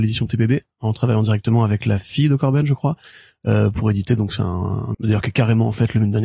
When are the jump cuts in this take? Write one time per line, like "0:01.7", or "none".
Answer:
0:04.9